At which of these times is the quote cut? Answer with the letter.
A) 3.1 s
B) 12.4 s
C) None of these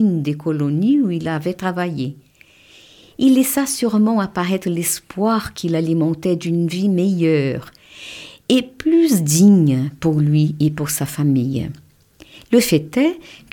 A